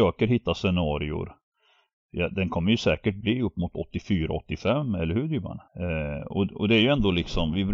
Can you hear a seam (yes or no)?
yes